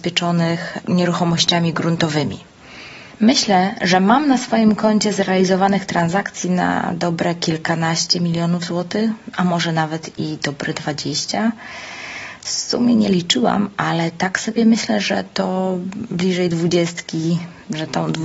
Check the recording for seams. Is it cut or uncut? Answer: uncut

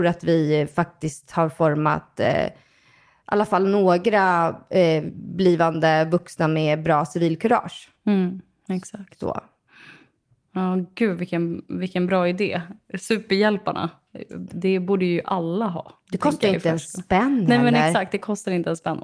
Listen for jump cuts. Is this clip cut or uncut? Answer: uncut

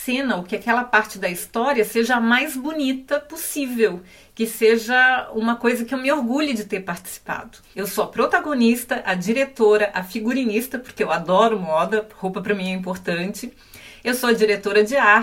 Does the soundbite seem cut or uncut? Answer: cut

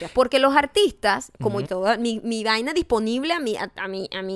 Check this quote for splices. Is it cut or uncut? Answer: cut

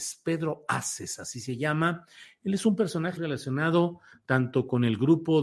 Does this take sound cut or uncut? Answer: cut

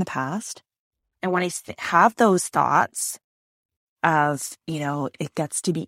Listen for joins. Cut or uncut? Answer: uncut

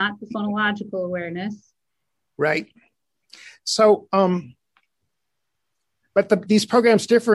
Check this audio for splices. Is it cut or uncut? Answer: uncut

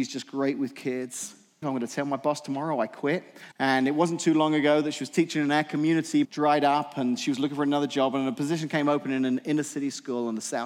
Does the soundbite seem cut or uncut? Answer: cut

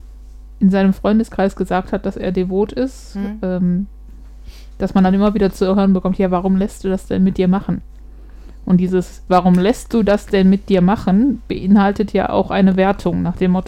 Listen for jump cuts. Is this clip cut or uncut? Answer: cut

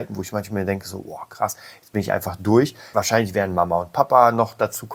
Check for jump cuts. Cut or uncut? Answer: cut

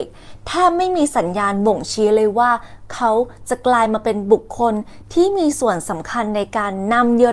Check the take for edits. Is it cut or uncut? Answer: uncut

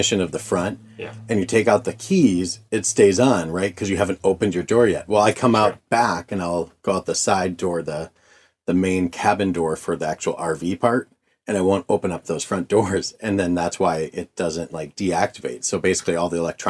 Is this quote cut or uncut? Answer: uncut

